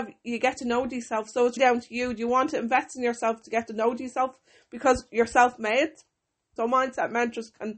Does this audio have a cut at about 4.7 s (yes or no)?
no